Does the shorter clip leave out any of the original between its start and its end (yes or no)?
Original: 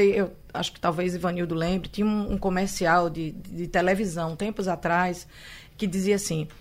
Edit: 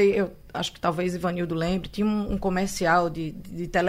no